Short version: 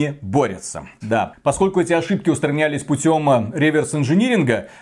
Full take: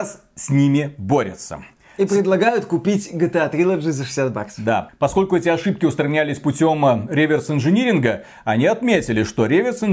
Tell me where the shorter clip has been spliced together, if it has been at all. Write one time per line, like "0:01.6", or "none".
0:01.0